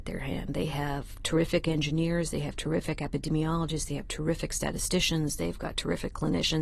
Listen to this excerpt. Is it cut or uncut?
uncut